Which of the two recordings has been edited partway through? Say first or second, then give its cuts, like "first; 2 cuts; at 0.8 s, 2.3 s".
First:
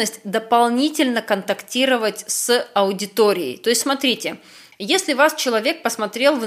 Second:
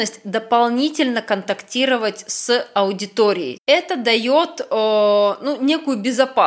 second; 1 cut; at 3.6 s